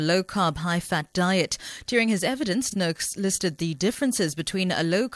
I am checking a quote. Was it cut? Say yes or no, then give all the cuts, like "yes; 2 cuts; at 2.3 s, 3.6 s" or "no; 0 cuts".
no; 0 cuts